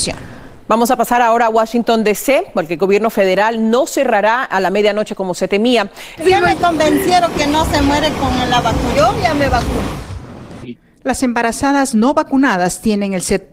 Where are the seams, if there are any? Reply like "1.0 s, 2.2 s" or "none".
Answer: 6.2 s, 8.9 s, 10.6 s